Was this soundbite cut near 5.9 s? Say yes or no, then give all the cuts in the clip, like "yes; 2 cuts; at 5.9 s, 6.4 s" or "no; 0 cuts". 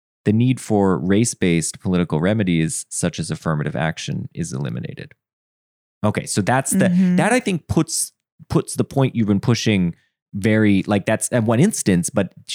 no; 0 cuts